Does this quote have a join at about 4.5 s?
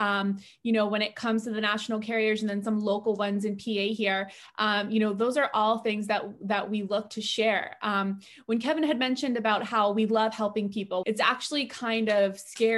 no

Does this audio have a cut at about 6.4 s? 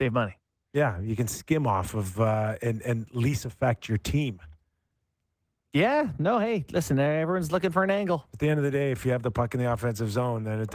no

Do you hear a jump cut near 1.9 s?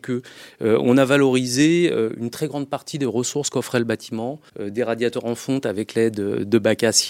no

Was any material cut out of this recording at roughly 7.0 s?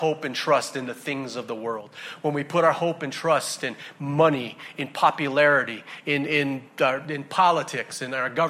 no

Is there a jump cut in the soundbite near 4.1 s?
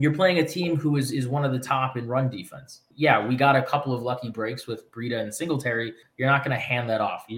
no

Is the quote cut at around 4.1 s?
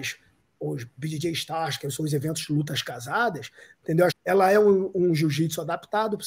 yes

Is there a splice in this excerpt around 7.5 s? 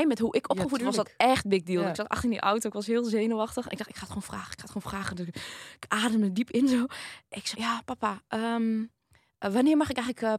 yes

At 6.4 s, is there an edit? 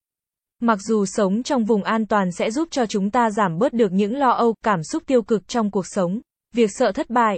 yes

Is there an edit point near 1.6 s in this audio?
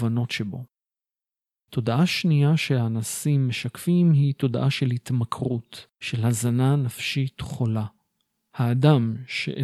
no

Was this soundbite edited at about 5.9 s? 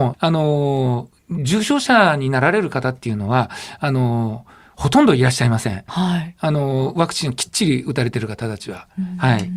yes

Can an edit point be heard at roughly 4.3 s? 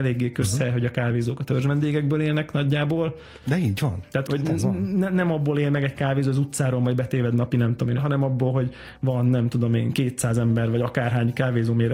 yes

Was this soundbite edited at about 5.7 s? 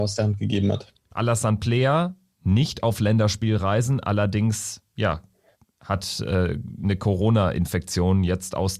no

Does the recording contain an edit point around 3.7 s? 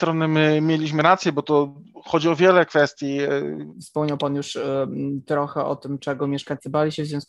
yes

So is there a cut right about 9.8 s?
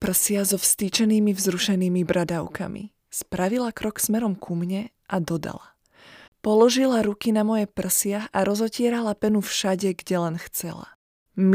no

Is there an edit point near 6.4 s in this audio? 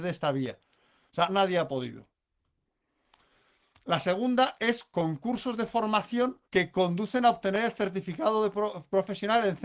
yes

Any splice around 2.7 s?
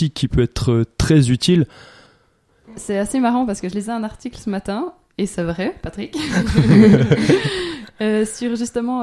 yes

